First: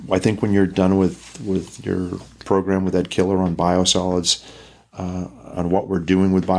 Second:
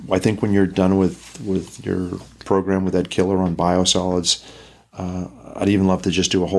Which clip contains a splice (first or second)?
first